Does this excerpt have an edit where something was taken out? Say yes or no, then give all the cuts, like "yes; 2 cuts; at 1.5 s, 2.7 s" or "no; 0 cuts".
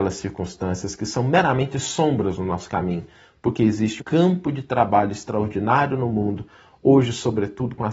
yes; 1 cut; at 4.0 s